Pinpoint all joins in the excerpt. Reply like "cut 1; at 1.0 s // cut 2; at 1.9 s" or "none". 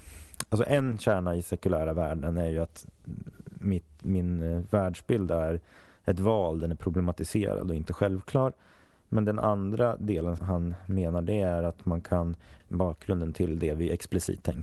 cut 1; at 10.4 s // cut 2; at 12.6 s